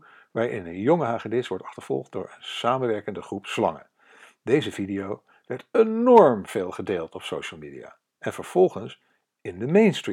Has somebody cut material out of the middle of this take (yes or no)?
no